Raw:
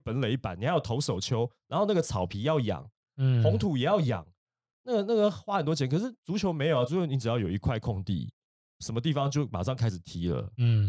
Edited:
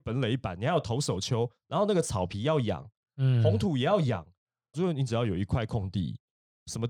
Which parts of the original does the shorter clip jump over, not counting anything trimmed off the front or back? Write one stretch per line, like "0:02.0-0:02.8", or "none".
0:04.7-0:06.9